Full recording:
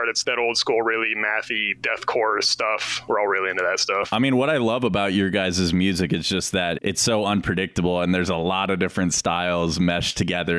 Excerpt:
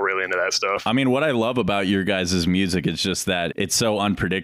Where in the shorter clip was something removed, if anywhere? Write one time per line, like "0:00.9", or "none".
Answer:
none